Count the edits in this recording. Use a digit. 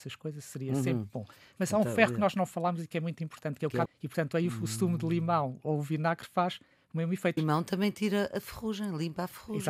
2